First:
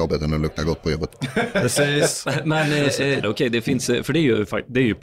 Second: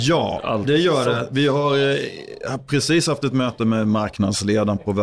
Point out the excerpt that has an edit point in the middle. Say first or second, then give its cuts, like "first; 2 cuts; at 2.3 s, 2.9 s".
first; 1 cut; at 3.2 s